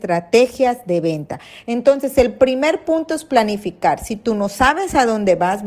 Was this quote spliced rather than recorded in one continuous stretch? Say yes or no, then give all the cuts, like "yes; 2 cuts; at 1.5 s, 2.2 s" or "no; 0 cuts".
no; 0 cuts